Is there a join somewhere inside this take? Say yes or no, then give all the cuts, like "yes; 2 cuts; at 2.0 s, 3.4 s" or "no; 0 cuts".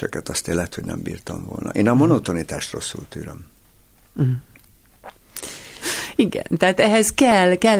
yes; 1 cut; at 5.8 s